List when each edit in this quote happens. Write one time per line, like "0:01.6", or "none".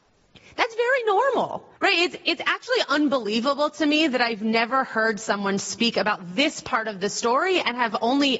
0:01.8